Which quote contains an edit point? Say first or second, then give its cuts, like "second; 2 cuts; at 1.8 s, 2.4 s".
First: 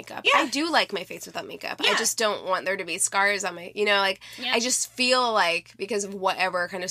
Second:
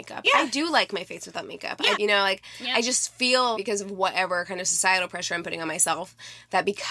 second; 3 cuts; at 1.9 s, 3.5 s, 5.1 s